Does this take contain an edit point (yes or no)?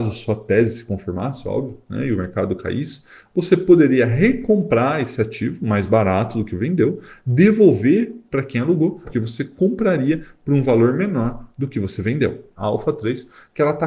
yes